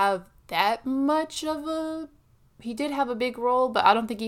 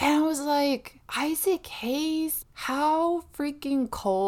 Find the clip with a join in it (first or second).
second